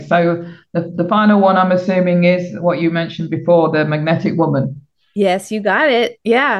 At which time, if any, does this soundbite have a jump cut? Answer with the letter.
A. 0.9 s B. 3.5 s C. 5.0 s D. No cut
D